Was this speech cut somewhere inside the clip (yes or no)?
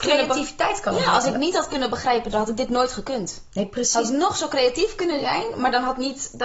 yes